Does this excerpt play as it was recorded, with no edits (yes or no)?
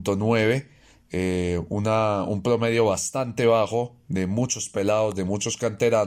yes